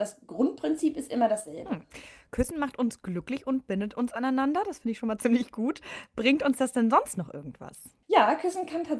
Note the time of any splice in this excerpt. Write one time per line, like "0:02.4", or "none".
0:08.0